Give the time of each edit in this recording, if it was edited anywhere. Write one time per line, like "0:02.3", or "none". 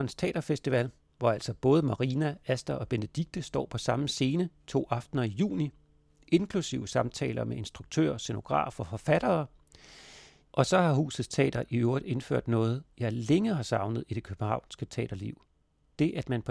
0:10.4